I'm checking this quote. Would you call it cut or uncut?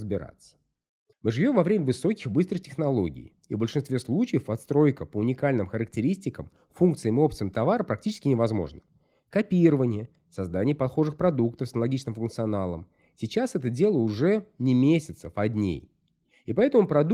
uncut